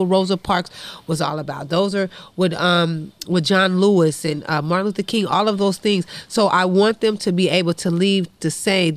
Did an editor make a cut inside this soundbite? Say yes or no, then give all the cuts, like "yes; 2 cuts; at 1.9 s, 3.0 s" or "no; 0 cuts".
no; 0 cuts